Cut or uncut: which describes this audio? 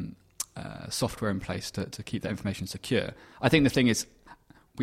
cut